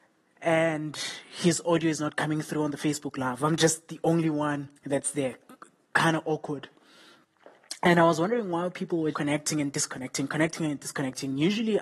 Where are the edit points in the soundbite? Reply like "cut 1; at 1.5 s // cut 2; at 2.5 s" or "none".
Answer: cut 1; at 4.8 s // cut 2; at 9.1 s